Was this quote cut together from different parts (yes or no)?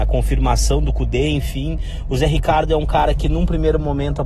no